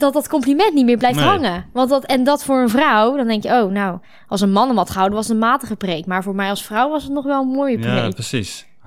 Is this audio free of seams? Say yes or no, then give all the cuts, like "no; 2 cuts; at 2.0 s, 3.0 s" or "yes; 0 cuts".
yes; 0 cuts